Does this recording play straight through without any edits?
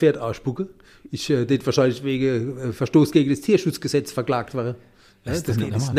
yes; 0 cuts

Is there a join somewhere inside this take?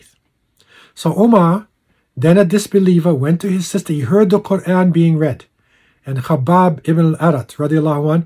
no; 0 cuts

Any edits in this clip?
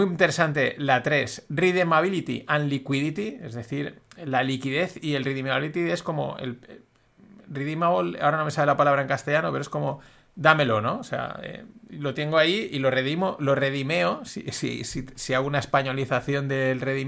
no; 0 cuts

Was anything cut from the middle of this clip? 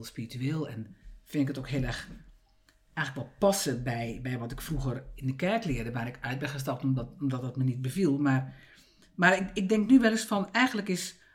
no; 0 cuts

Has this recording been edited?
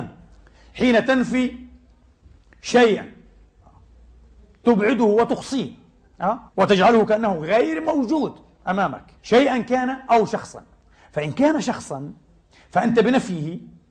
yes; 2 cuts; at 6.5 s, 9.2 s

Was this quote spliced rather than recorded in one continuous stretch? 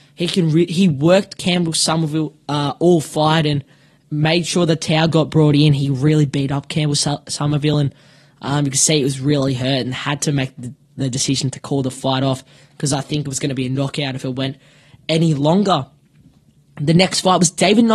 no; 0 cuts

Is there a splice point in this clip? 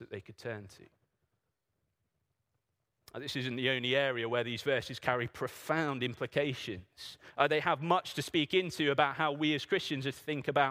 no; 0 cuts

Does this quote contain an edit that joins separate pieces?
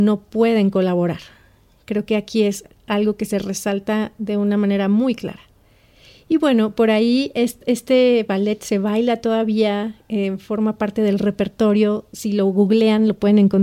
no; 0 cuts

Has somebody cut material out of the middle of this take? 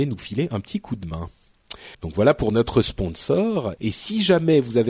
yes; 2 cuts; at 1.9 s, 3.8 s

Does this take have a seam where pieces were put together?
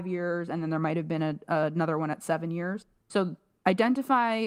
no; 0 cuts

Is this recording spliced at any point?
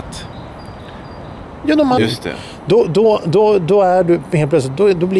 yes; 1 cut; at 2.0 s

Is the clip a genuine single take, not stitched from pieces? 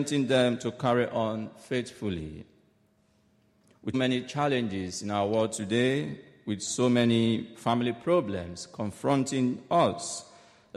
no; 1 cut; at 3.9 s

